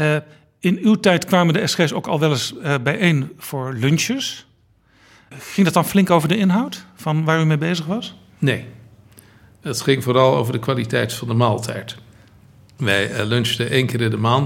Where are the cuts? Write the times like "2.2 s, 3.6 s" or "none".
none

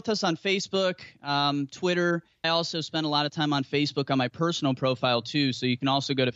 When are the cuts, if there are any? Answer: 2.4 s

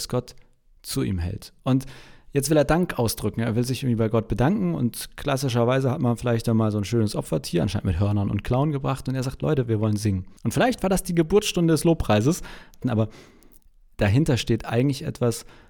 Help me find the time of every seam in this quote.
10.4 s, 12.8 s

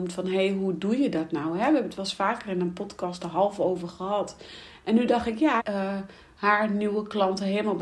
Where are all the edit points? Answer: 5.6 s

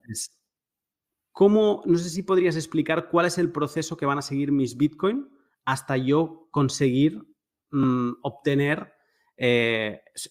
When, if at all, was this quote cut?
none

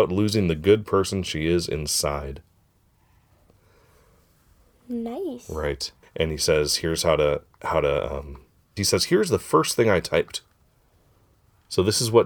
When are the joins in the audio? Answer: 6.0 s, 8.8 s

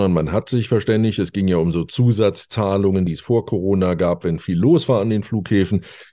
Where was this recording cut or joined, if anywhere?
none

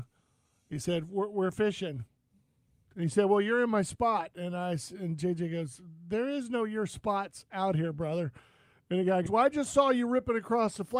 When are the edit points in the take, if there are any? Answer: 9.3 s

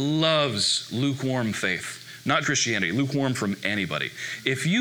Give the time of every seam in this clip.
2.4 s

